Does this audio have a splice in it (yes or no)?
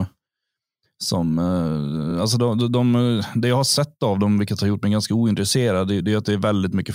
no